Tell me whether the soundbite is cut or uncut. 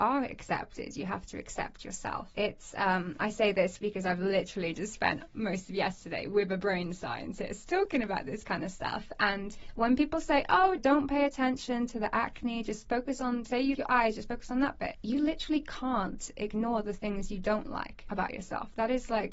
cut